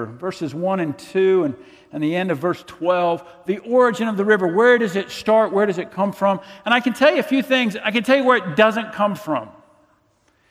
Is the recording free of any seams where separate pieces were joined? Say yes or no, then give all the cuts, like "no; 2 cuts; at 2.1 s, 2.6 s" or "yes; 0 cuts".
yes; 0 cuts